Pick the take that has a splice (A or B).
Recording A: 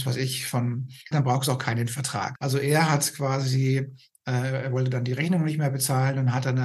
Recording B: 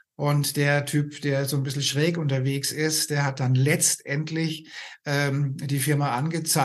A